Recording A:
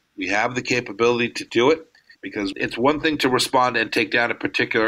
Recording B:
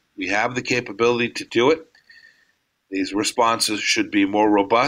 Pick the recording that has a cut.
A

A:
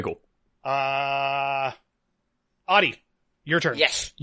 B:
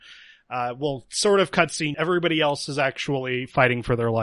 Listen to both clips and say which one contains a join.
B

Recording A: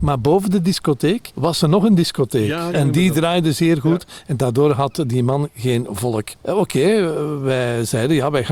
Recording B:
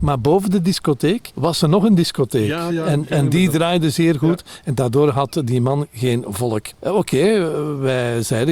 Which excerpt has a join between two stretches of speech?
A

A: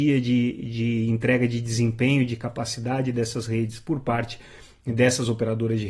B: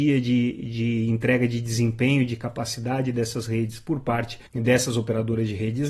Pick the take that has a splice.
B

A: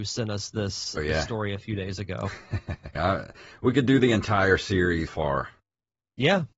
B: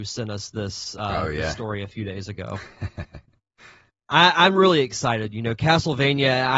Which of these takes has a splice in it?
A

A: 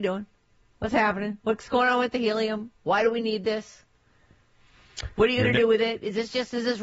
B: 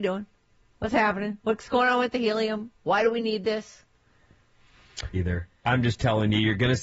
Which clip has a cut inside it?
B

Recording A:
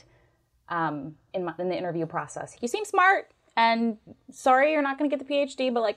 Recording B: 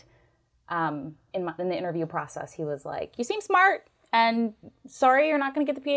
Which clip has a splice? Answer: A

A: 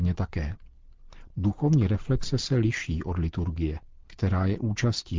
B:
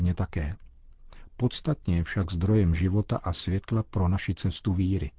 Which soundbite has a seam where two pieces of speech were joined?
A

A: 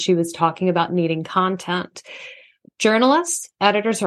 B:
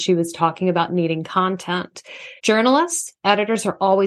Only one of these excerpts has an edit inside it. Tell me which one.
B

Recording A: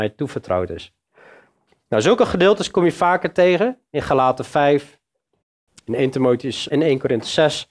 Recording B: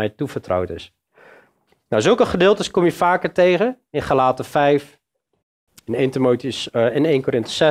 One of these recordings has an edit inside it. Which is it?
A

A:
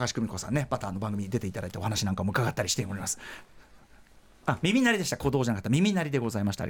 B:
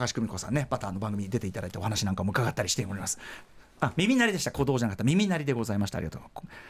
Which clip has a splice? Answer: B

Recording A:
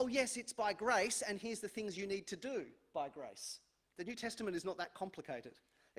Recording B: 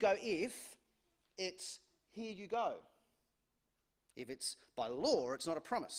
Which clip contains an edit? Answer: A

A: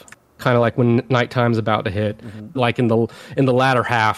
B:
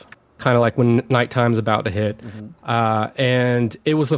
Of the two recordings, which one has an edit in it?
A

